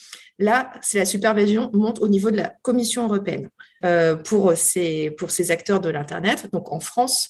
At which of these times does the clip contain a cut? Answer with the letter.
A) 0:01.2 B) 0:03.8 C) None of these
B